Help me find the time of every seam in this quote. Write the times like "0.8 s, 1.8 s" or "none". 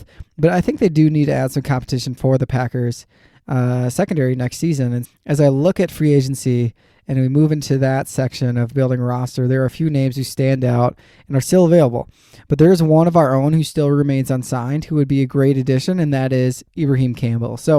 5.0 s